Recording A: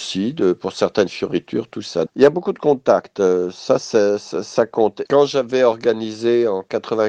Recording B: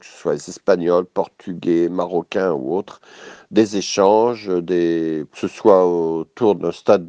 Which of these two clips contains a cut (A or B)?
A